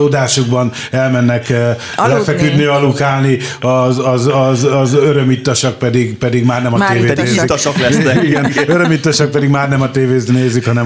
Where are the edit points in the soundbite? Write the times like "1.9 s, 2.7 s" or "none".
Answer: none